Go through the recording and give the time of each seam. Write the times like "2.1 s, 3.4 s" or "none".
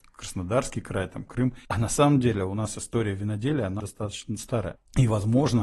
1.6 s, 3.8 s